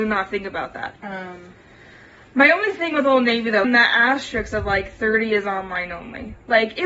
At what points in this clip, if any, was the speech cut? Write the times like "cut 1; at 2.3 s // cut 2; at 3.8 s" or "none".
cut 1; at 1.0 s // cut 2; at 3.6 s